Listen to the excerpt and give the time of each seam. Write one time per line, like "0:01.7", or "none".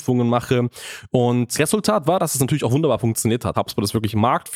0:01.5
0:03.5